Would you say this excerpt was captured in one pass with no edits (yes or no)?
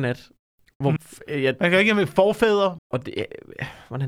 no